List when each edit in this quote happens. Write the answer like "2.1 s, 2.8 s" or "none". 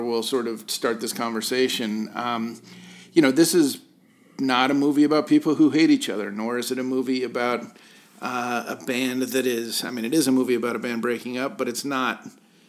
none